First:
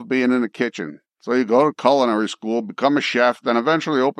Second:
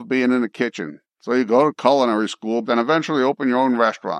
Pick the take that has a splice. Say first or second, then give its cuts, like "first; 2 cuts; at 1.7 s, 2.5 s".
second; 1 cut; at 2.6 s